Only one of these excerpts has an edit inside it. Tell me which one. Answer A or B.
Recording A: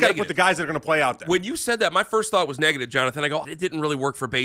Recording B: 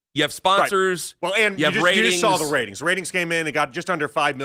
A